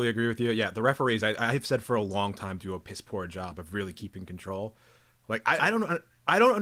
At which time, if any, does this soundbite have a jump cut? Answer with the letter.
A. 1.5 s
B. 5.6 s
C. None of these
B